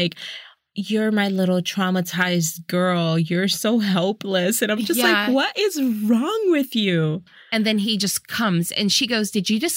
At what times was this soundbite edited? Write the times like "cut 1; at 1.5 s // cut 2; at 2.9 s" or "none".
none